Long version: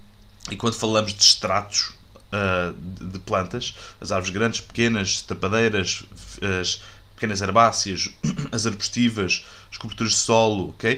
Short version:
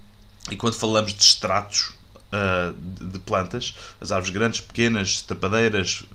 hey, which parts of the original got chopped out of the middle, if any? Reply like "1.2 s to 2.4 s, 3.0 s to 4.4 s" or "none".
none